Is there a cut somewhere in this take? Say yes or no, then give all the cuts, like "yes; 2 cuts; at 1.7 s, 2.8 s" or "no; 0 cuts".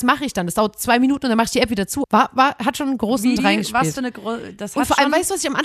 yes; 2 cuts; at 2.0 s, 3.4 s